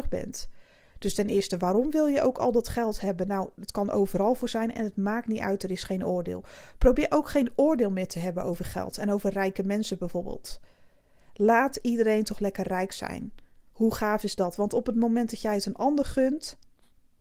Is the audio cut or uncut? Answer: uncut